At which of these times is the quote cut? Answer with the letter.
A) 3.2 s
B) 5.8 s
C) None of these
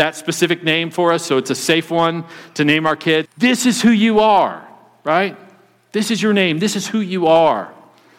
A